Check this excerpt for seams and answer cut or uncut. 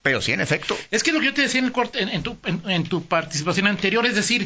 uncut